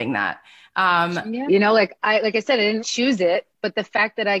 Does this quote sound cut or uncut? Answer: cut